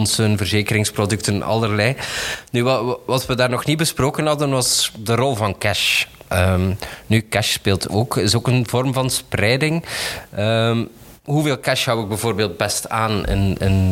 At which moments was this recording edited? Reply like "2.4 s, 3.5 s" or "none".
none